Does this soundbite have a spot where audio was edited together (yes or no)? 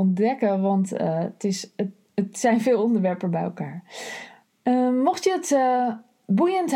no